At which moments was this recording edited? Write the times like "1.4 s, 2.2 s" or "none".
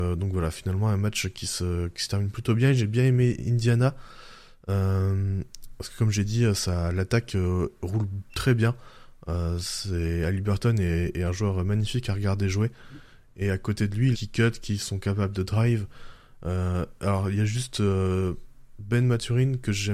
14.1 s